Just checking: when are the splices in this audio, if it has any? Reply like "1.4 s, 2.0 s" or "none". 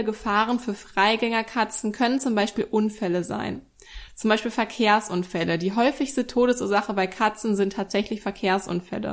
none